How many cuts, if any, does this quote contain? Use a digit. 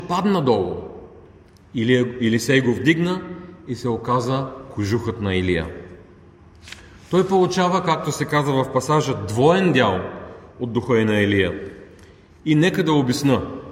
0